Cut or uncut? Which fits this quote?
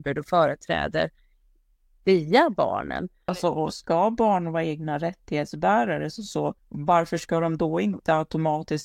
cut